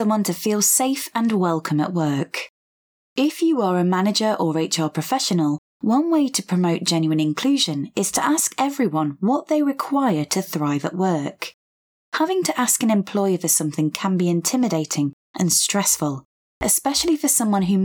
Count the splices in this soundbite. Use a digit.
0